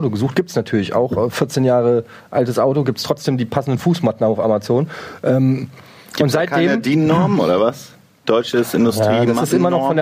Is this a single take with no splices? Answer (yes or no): yes